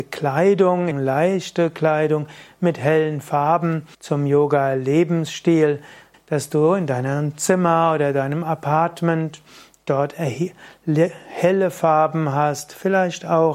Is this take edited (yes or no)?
yes